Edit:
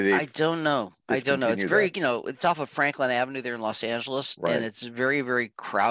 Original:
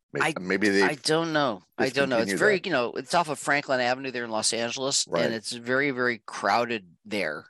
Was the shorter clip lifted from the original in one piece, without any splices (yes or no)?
yes